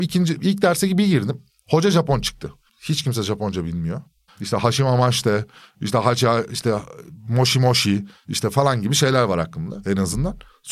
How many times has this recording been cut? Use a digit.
2